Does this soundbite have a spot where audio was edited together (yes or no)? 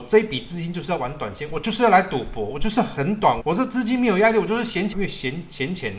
yes